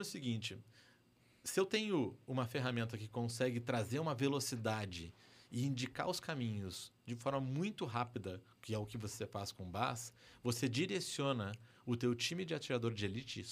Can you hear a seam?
no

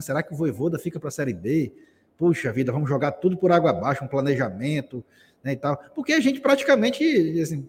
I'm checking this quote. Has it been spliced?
no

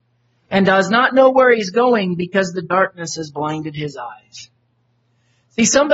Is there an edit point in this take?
no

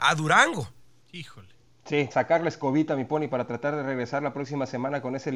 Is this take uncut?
no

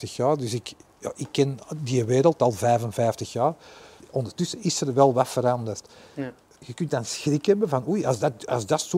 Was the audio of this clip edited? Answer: no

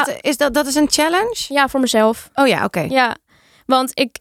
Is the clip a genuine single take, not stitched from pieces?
yes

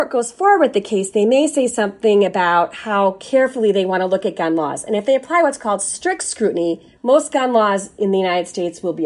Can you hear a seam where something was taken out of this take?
yes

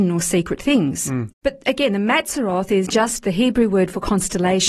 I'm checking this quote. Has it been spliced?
yes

